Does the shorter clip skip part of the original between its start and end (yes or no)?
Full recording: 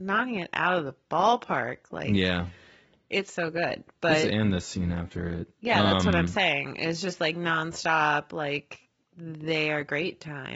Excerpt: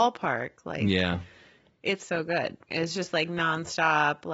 yes